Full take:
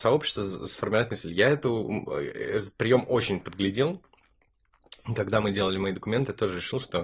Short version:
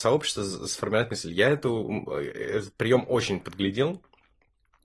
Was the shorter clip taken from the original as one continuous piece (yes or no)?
yes